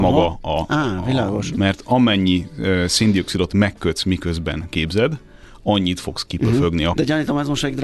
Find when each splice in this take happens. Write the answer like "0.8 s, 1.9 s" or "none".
1.5 s, 6.9 s